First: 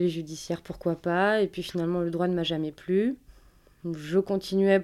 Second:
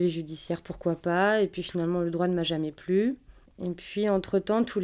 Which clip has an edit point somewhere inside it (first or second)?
second